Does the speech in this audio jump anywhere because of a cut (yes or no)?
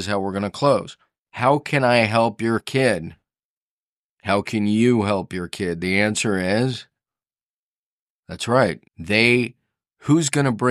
yes